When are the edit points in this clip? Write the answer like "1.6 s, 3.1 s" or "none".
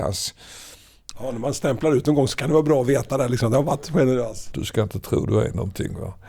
1.1 s, 4.5 s